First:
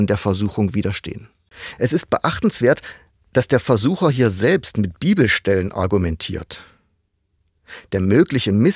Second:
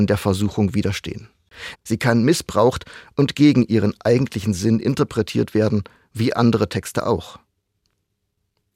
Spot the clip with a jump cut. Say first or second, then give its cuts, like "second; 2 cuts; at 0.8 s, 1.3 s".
second; 1 cut; at 1.7 s